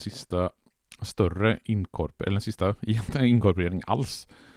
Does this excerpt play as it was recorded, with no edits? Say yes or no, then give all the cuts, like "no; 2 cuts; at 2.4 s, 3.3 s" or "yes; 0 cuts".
yes; 0 cuts